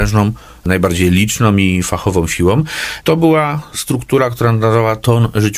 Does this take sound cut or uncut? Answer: cut